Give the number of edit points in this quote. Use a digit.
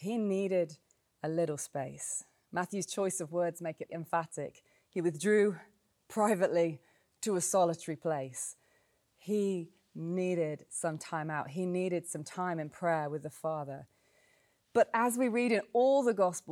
1